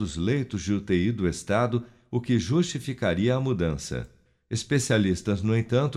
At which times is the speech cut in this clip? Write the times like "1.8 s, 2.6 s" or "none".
none